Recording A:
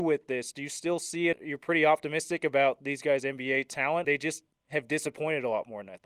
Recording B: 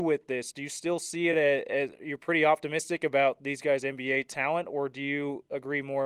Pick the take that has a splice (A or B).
A